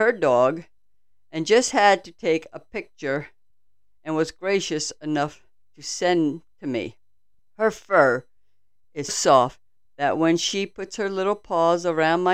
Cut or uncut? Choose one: cut